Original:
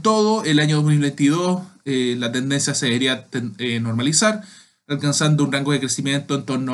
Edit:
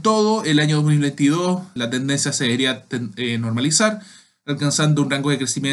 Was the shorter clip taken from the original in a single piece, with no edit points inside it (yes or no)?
no